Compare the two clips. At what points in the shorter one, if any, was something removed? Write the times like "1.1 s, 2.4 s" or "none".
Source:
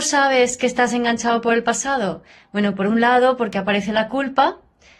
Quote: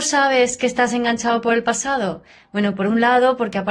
none